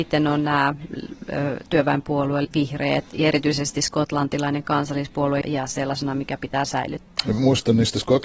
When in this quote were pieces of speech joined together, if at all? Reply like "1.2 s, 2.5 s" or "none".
2.4 s, 5.4 s